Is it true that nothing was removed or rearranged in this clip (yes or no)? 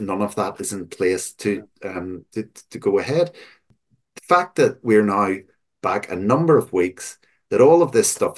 yes